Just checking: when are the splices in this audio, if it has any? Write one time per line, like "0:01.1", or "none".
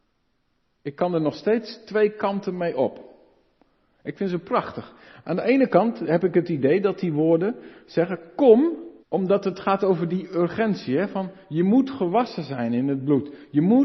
0:09.0